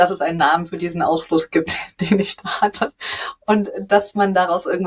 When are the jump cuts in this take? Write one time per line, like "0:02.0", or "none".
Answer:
none